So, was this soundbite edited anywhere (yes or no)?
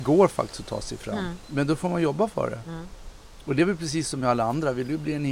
no